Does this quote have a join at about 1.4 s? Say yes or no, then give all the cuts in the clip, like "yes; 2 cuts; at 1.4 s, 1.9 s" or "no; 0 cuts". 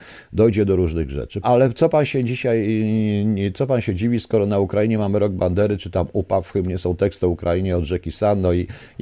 yes; 1 cut; at 1.4 s